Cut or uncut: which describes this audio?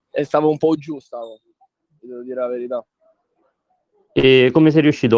uncut